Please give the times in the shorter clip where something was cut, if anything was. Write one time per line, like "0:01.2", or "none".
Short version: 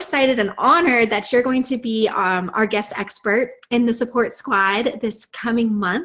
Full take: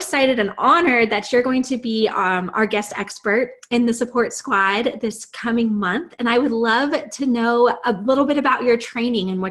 none